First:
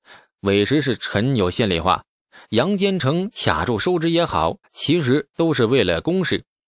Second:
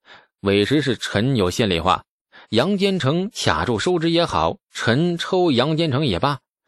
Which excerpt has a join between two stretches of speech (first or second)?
first